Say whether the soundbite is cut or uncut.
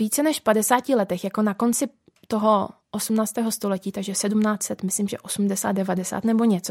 uncut